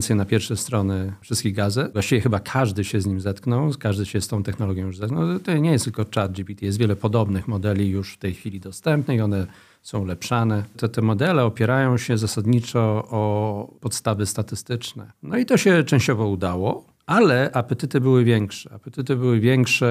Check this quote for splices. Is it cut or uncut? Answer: cut